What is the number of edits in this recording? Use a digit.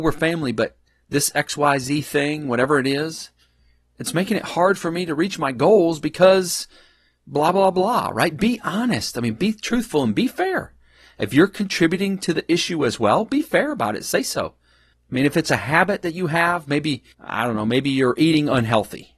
2